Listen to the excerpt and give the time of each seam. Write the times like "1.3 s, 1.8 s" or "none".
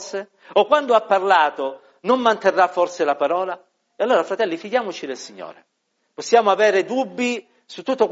none